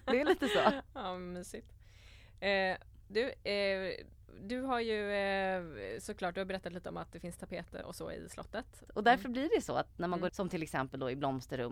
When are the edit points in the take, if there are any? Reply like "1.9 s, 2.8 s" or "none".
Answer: 7.8 s, 8.9 s, 10.3 s